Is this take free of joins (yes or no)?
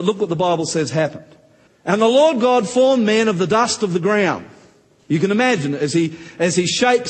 no